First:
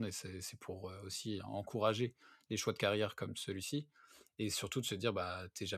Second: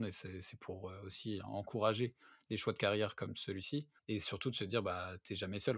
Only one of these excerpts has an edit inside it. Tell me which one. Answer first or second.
second